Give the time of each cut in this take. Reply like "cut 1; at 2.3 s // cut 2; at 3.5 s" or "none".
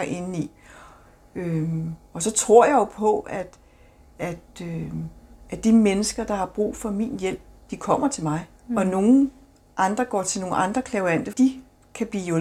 cut 1; at 8.6 s // cut 2; at 11.3 s